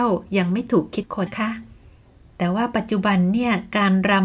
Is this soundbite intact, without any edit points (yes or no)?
no